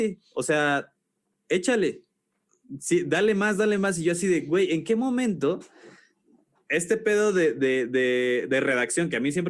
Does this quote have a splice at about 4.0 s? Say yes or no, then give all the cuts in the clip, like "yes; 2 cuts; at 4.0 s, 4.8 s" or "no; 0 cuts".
no; 0 cuts